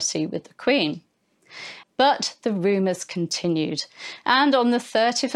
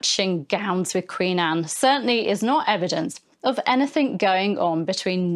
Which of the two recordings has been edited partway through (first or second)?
first